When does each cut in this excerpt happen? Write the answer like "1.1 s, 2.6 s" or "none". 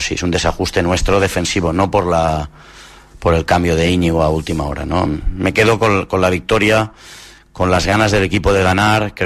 none